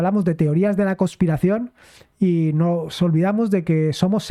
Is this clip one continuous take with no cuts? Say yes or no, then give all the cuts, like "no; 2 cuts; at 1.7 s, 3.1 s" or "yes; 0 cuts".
yes; 0 cuts